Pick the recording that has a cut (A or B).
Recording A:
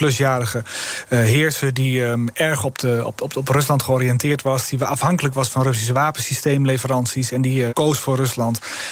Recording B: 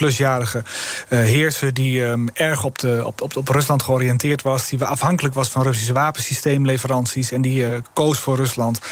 A